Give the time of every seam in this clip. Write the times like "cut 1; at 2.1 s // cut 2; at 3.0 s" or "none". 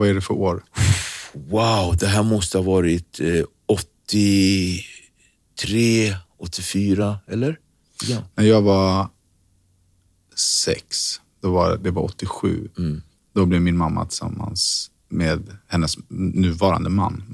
none